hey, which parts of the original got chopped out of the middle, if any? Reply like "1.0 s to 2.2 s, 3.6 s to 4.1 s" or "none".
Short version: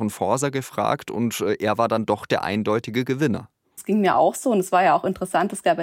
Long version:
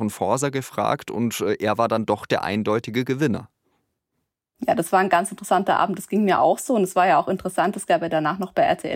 3.8 s to 6.0 s